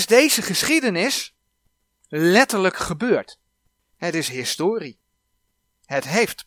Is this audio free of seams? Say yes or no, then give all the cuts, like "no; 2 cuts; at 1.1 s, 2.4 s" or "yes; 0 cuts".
no; 1 cut; at 3.9 s